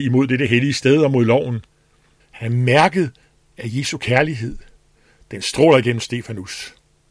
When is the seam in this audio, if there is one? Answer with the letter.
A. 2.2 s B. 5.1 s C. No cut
A